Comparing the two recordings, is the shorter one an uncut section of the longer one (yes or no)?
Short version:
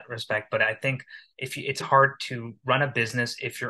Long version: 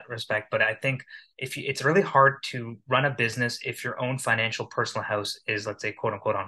no